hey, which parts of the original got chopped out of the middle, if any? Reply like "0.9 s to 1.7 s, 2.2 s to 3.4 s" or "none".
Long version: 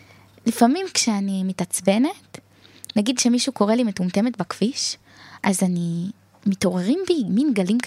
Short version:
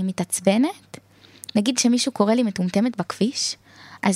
none